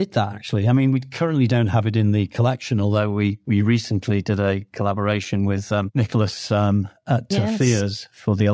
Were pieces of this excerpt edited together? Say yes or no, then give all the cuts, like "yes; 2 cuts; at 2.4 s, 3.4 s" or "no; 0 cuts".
no; 0 cuts